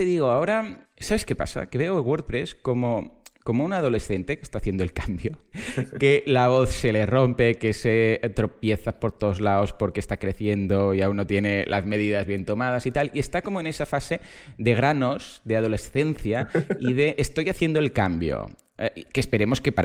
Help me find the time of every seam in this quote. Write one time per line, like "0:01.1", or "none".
none